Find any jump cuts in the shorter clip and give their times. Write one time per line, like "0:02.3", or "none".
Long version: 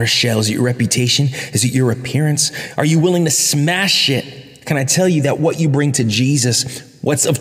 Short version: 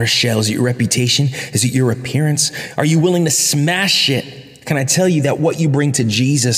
none